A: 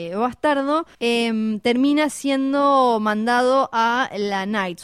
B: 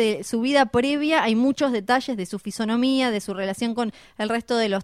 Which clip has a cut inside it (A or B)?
A